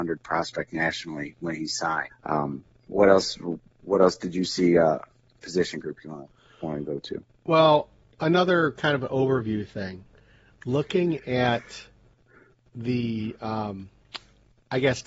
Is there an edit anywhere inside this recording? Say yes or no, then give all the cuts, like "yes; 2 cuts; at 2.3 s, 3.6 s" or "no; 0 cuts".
yes; 2 cuts; at 2.1 s, 5.4 s